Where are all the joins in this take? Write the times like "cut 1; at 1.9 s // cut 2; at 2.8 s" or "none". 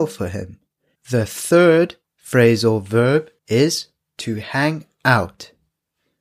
cut 1; at 1.0 s // cut 2; at 3.4 s